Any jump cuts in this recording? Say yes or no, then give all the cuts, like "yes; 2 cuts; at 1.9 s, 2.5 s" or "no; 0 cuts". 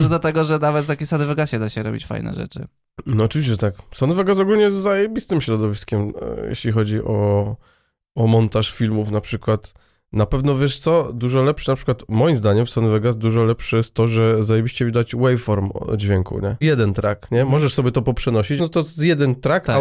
yes; 2 cuts; at 16.6 s, 18.6 s